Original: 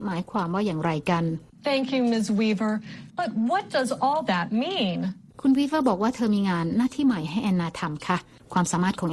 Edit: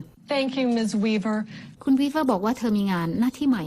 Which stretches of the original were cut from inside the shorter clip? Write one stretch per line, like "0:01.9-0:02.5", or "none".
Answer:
0:03.1-0:05.3